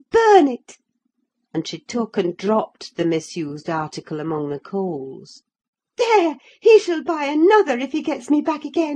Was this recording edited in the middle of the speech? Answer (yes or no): no